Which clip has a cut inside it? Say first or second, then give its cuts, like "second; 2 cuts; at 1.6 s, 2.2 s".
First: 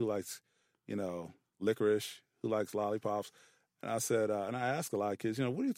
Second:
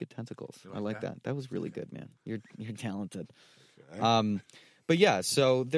second; 1 cut; at 2.1 s